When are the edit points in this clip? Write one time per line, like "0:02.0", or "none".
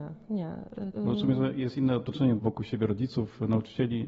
0:00.9
0:02.4